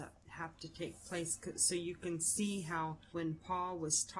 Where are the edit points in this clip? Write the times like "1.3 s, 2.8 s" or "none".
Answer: 3.1 s